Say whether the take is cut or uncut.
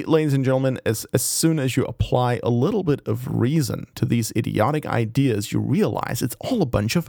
uncut